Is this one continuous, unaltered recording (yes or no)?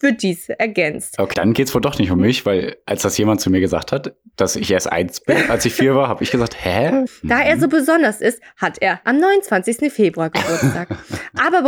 no